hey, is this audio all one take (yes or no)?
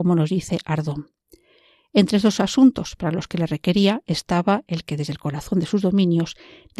yes